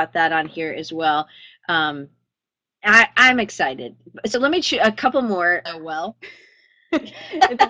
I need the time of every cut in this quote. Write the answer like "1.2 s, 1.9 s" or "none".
5.7 s